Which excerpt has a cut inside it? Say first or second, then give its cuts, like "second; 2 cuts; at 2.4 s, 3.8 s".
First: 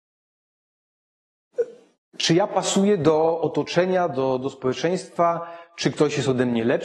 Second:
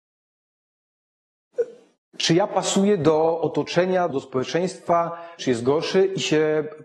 second; 2 cuts; at 4.1 s, 5.4 s